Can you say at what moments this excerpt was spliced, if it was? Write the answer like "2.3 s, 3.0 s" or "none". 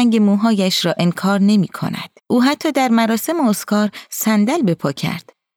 2.2 s